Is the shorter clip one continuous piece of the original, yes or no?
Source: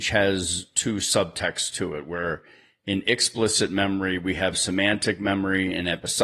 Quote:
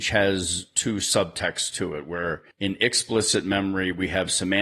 no